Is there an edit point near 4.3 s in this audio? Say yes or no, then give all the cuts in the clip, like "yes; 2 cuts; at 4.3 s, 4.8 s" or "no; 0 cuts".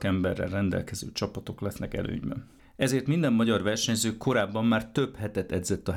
no; 1 cut; at 2.6 s